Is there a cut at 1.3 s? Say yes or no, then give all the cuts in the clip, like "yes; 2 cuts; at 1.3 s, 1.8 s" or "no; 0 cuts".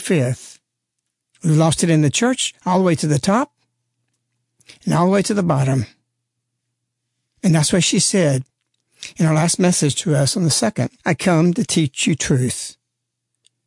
yes; 2 cuts; at 1.3 s, 11.0 s